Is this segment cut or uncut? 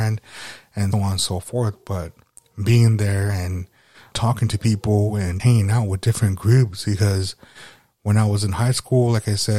cut